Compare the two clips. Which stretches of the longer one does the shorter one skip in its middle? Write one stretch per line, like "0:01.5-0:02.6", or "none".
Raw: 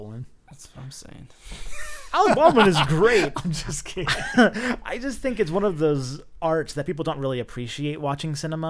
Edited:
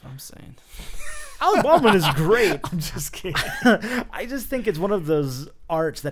none